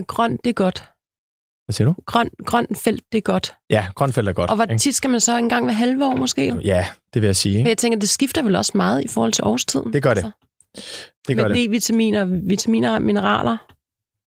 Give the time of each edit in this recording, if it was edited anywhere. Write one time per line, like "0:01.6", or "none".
0:06.5

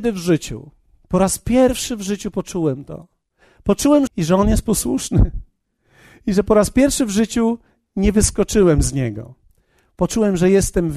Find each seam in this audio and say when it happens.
0:04.1

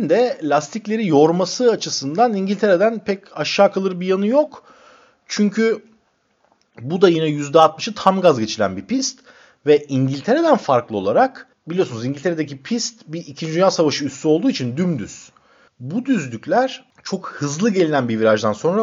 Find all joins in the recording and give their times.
0:15.7
0:16.9

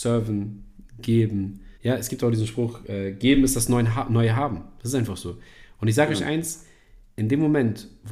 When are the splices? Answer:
0:01.8

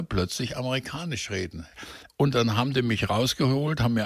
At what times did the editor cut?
none

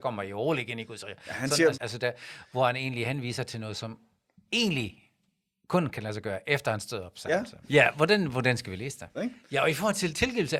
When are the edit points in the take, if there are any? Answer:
0:01.7
0:07.6
0:09.1

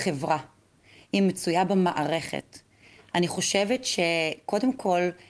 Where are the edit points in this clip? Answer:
none

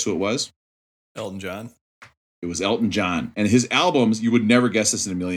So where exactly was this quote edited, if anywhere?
none

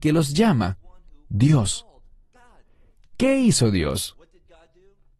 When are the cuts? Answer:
none

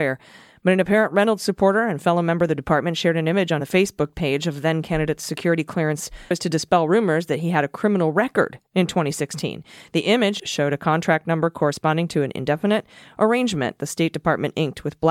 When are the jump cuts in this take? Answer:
0:06.3
0:10.4

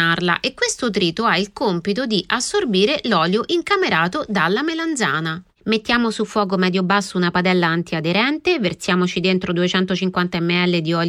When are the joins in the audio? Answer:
none

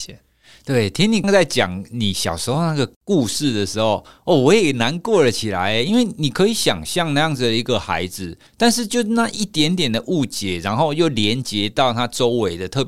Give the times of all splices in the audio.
0:01.2
0:08.5

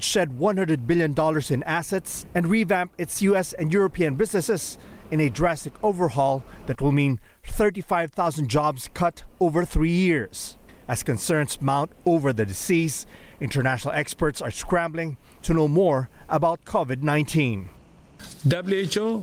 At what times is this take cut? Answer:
0:02.3

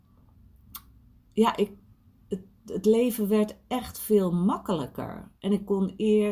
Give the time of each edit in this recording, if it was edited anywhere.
none

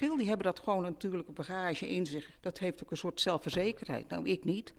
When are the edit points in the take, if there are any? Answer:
0:02.3

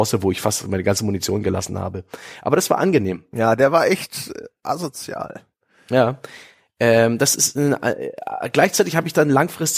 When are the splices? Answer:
none

